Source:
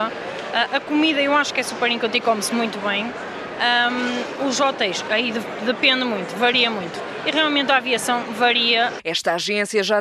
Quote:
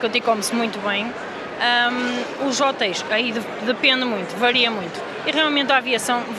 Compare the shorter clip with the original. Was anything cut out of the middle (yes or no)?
no